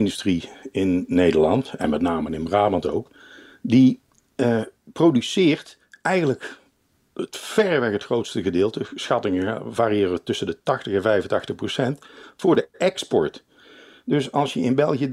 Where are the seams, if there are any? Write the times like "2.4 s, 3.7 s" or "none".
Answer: none

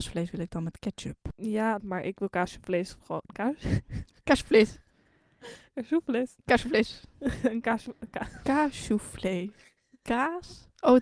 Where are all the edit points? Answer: 1.8 s

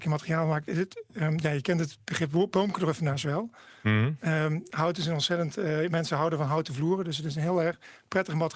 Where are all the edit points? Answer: none

